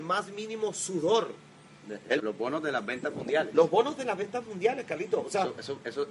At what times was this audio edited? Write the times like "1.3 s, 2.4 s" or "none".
2.2 s